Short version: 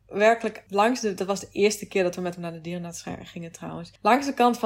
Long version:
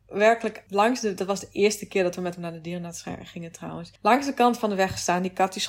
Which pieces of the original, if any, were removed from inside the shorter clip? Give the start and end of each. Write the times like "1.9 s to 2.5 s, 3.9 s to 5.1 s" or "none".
none

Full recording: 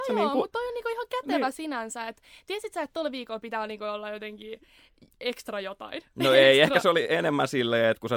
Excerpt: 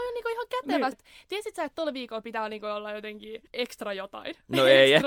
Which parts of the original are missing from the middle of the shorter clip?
1.5 s to 2.1 s, 4.6 s to 5.1 s

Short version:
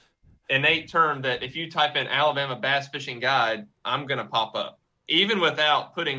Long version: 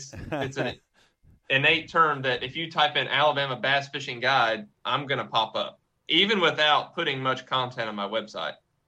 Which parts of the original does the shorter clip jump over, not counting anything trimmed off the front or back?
none

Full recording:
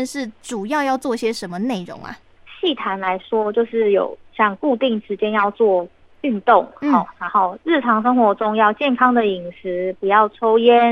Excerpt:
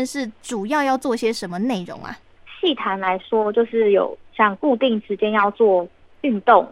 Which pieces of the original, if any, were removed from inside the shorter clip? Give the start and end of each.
none

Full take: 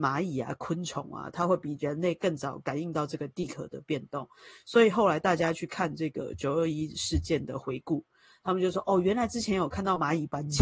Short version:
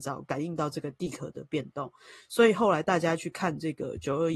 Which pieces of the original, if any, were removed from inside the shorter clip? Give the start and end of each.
none

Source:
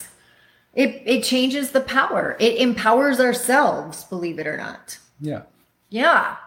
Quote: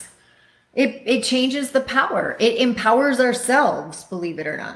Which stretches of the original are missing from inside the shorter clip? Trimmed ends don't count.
none

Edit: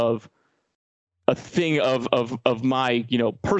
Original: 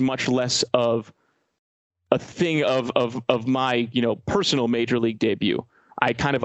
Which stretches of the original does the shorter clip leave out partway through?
none

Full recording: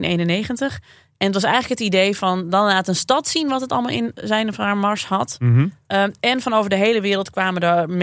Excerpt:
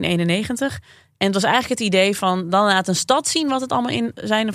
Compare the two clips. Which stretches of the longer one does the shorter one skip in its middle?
none

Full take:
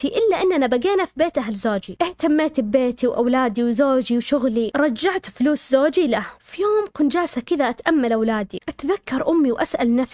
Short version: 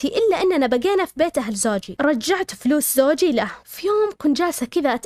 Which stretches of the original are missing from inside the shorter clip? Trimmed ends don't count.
2.0 s to 4.7 s

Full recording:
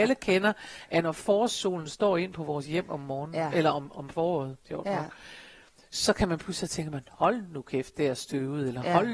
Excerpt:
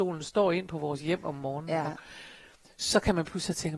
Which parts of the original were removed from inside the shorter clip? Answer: 3.5 s to 5.0 s

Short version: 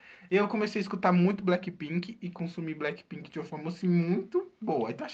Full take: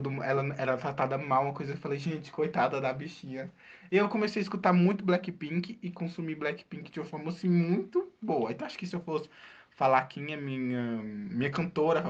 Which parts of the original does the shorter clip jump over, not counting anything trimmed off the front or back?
none

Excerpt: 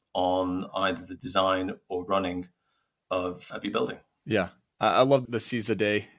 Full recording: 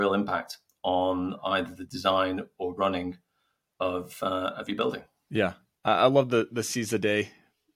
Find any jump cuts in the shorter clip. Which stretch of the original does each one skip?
4.2 s to 4.5 s, 6.3 s to 6.5 s

